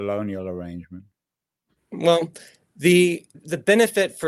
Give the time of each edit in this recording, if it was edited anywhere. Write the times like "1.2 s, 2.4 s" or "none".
3.3 s